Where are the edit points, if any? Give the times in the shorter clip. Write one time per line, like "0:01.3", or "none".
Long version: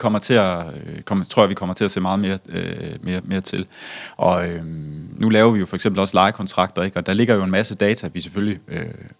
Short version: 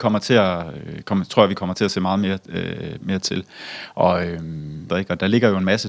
0:03.0
0:04.9

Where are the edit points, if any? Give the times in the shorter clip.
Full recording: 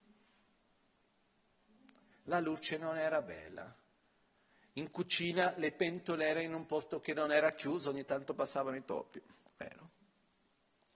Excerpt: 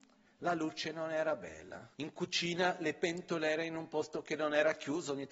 0:01.9

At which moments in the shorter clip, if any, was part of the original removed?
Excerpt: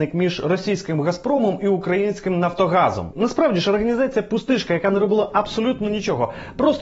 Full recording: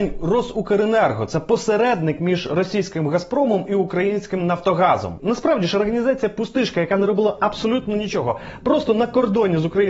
none

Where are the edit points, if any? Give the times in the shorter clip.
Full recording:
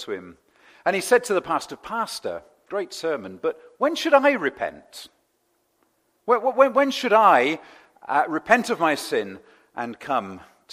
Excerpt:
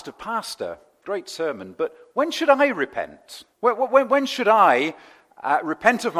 0:03.5

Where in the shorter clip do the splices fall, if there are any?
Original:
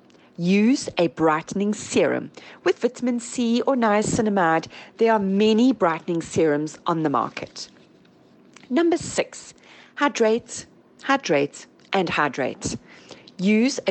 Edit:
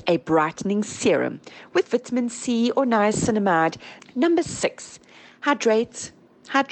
0:04.0

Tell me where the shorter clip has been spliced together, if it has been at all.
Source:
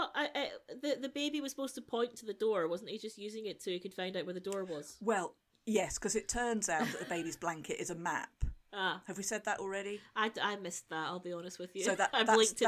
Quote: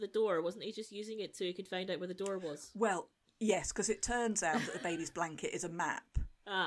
none

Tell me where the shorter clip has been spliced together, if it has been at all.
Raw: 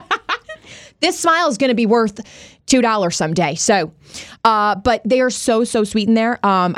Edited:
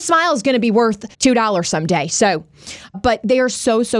0:01.1
0:02.9

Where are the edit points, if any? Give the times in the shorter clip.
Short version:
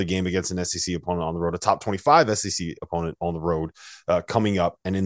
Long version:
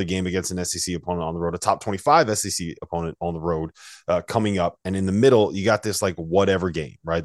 none

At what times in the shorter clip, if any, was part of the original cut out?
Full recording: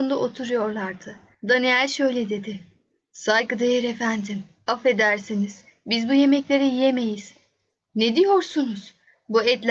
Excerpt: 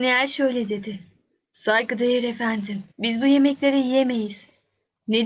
0:02.9

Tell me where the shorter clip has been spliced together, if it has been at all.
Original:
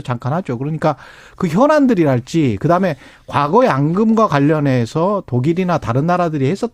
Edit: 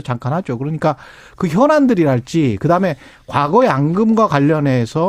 none

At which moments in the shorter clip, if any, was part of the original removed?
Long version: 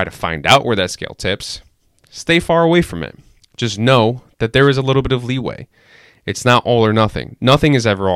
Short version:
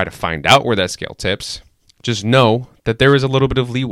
0:01.9

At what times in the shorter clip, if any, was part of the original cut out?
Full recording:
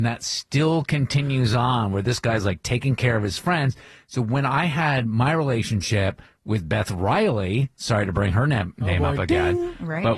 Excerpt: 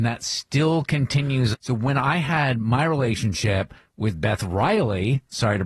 0:01.5

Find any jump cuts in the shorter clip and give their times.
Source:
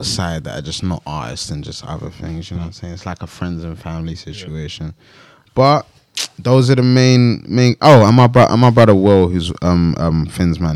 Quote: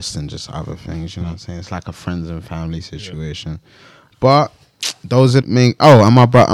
0:05.4

